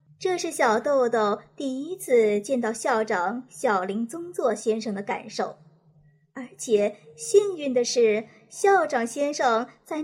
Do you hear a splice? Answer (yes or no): no